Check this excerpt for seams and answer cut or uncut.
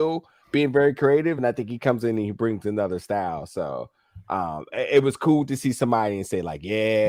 uncut